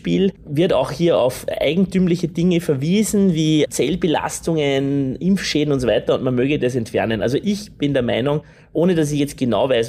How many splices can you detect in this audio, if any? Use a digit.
0